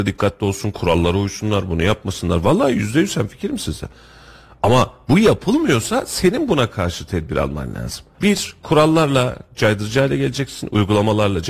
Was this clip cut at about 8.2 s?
yes; 1 cut; at 8.2 s

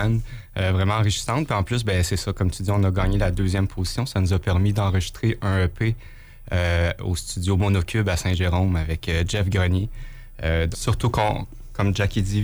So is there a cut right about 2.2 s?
no; 1 cut; at 10.7 s

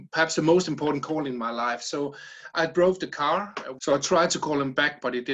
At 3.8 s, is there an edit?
yes; 1 cut; at 3.8 s

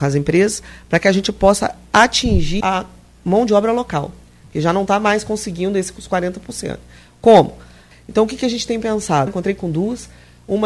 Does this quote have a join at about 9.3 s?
yes; 3 cuts; at 2.6 s, 7.9 s, 9.3 s

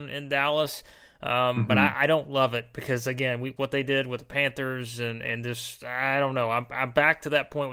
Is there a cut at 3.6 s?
yes; 1 cut; at 3.6 s

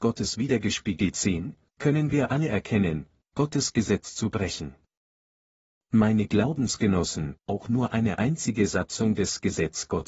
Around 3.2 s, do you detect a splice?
yes; 2 cuts; at 3.2 s, 7.4 s

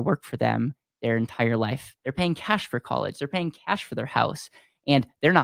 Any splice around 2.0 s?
yes; 1 cut; at 2.0 s

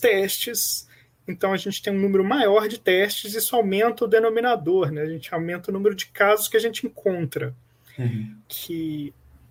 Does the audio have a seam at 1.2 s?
no; 1 cut; at 8.4 s

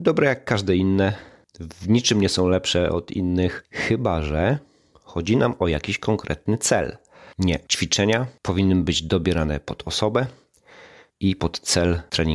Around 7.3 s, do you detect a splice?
yes; 1 cut; at 7.3 s

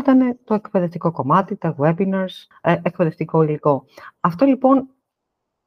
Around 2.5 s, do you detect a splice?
yes; 1 cut; at 2.5 s

